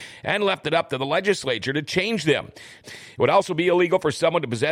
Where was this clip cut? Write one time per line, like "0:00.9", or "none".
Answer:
0:02.8